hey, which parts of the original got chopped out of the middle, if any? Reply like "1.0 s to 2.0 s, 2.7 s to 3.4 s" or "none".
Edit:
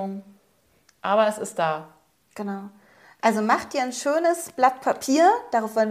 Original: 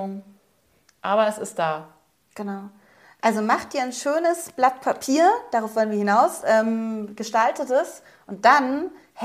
none